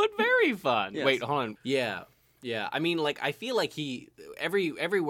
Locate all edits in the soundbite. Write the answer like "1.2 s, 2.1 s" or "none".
1.6 s